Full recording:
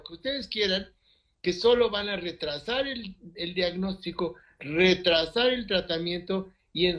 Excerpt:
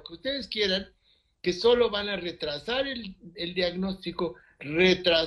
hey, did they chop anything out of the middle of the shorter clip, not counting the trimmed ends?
no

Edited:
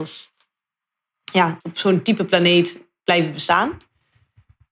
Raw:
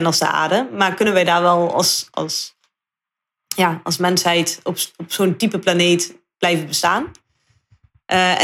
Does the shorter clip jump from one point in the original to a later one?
yes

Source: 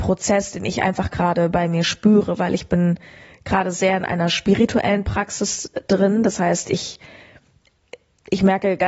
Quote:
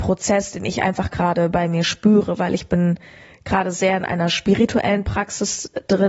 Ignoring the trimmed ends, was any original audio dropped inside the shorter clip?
no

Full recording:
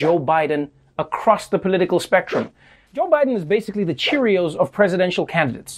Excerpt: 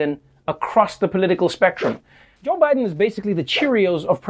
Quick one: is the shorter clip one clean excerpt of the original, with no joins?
yes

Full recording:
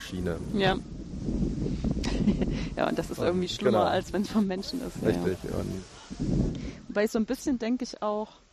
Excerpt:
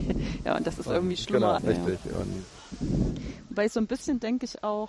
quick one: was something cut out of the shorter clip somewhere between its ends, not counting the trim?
yes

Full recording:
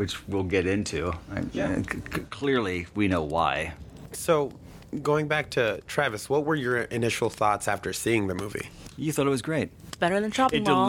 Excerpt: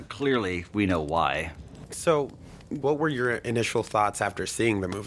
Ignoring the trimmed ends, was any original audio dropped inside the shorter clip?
yes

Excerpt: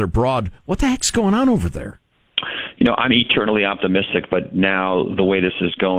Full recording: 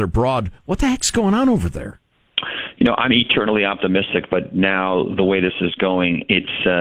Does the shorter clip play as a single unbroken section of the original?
yes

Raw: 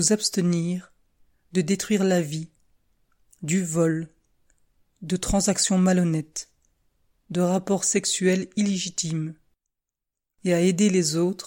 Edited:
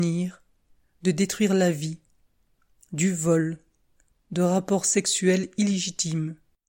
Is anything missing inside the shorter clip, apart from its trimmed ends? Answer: yes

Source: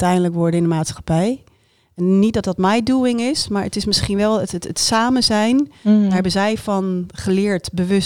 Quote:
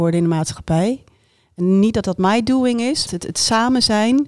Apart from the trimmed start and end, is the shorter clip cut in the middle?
yes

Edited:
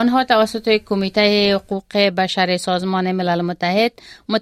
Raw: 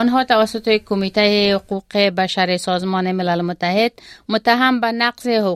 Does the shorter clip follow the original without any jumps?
yes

